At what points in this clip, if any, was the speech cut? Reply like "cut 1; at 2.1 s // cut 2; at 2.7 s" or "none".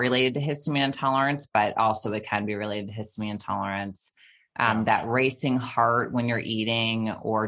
none